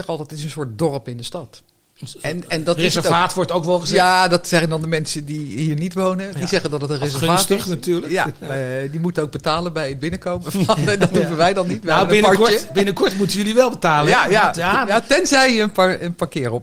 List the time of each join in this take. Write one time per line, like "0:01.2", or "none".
none